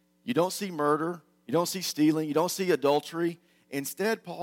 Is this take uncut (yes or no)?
yes